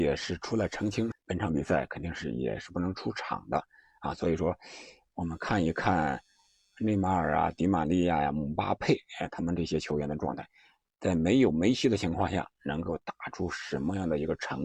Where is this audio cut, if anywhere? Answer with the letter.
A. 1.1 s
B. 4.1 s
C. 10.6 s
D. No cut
A